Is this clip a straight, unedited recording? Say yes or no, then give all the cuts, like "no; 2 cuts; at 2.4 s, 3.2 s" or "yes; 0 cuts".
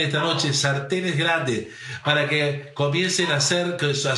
yes; 0 cuts